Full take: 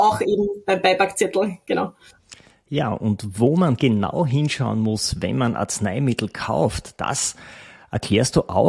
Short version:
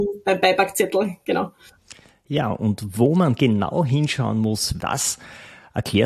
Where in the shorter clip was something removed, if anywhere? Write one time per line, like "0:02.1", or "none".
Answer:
0:04.8

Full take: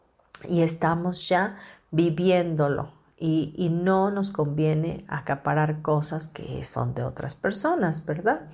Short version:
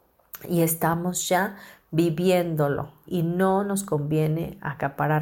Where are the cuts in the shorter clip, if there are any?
0:03.1

